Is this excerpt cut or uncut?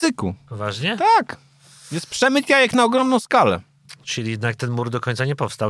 uncut